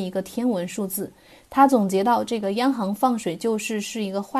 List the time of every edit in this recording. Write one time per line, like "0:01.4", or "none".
none